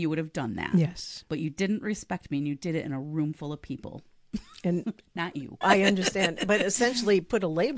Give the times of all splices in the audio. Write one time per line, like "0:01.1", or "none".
0:05.6